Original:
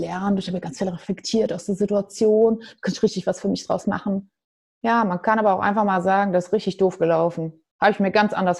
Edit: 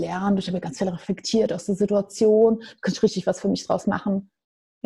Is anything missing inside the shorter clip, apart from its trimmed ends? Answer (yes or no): no